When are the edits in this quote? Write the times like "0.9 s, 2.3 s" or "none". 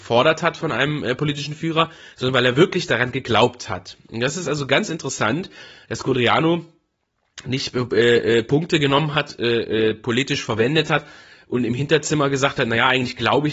none